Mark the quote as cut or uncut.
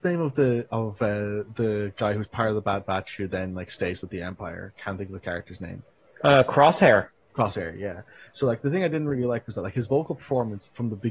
uncut